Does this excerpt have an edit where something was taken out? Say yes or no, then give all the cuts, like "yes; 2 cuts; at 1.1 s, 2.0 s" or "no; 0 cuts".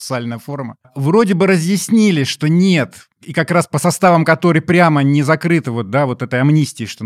no; 0 cuts